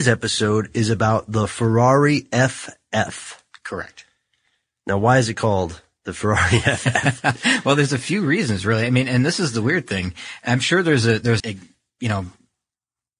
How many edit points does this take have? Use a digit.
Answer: 1